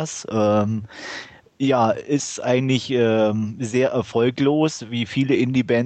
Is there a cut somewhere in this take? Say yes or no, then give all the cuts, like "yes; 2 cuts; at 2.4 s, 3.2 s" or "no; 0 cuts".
no; 0 cuts